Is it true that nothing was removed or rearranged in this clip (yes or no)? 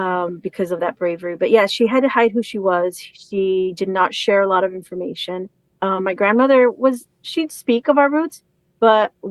no